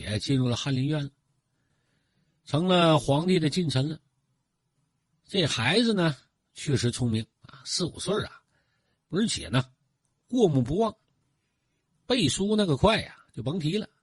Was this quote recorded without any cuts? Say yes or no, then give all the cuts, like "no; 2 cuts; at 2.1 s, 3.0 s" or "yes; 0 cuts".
no; 3 cuts; at 5.1 s, 7.3 s, 8.9 s